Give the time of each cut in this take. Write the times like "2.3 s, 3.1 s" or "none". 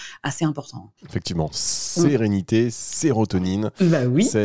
1.0 s